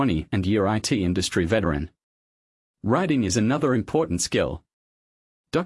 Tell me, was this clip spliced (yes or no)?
no